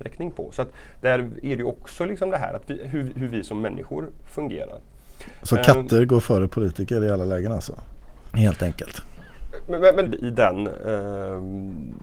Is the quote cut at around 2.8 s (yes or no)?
no